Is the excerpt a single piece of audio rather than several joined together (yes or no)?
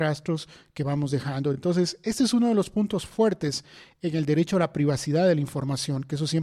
yes